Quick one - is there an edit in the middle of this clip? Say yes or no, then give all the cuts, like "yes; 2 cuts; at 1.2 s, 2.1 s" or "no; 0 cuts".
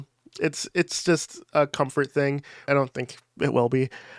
yes; 1 cut; at 2.7 s